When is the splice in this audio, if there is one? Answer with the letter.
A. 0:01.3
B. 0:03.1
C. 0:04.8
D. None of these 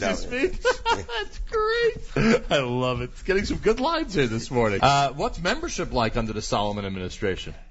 C